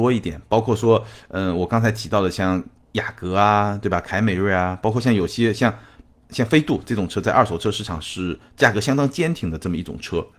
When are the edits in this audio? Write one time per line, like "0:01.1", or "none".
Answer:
none